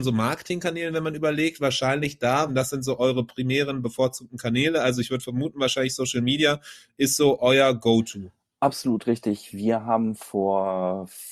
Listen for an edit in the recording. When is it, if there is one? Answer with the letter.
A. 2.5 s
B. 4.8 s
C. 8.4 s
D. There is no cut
A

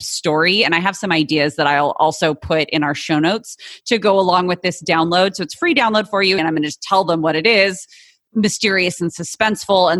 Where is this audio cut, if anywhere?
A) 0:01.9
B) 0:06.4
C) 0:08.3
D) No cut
B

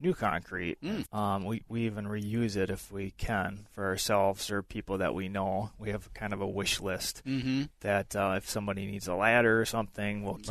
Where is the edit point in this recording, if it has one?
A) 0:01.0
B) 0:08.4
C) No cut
A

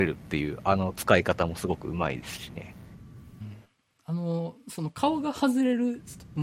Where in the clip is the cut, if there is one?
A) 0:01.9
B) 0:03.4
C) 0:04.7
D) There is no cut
B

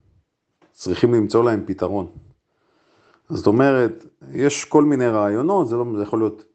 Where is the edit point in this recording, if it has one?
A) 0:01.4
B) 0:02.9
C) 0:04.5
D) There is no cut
D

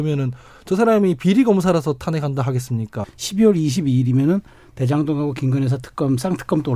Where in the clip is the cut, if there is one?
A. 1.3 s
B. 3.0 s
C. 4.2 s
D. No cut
B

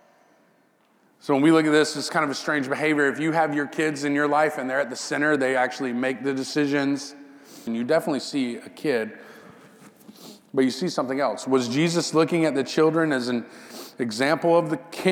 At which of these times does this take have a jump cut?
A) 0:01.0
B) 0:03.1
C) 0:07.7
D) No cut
C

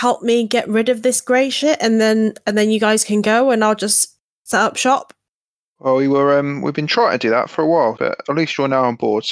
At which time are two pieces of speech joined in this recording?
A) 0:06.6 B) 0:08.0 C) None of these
B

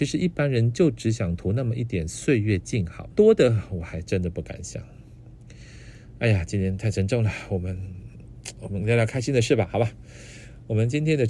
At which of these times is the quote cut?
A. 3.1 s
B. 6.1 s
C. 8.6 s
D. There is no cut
A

